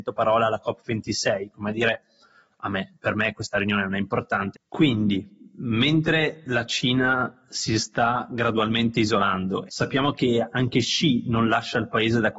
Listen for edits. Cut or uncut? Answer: cut